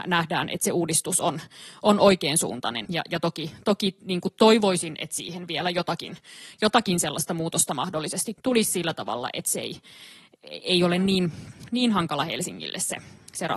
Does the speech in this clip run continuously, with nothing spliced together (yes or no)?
no